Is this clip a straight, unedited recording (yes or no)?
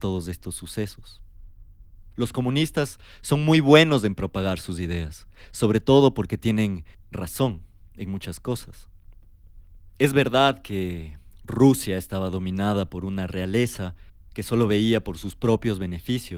no